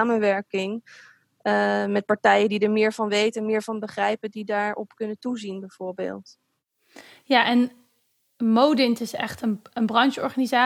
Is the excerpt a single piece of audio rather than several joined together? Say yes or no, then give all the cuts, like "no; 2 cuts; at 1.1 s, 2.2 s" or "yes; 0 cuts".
yes; 0 cuts